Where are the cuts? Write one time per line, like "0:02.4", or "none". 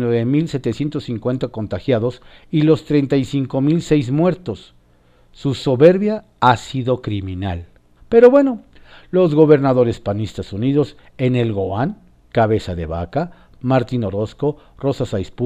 0:08.0
0:13.6